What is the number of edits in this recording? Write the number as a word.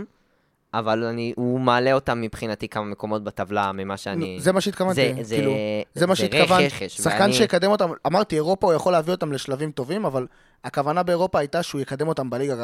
one